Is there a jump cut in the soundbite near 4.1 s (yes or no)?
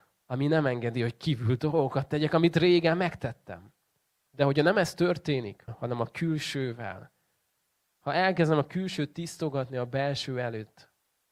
yes